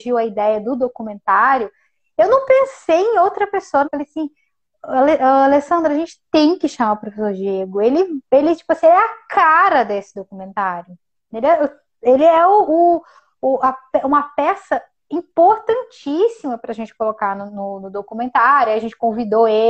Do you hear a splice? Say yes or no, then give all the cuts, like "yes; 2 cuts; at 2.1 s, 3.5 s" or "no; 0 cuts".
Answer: yes; 1 cut; at 3.8 s